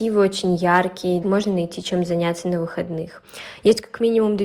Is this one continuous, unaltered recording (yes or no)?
no